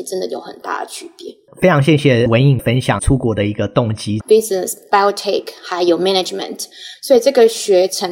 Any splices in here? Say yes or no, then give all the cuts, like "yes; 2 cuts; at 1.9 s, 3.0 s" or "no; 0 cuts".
yes; 1 cut; at 4.2 s